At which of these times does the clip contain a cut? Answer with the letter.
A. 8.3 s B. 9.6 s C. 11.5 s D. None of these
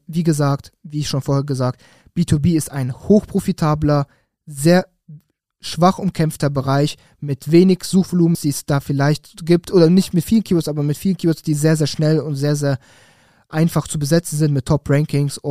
A